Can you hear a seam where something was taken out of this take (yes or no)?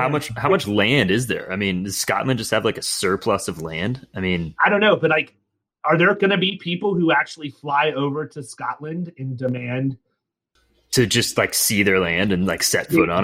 yes